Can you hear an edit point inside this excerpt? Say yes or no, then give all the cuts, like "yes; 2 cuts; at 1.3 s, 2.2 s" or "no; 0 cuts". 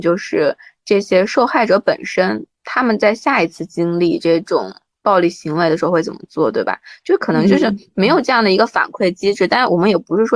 no; 0 cuts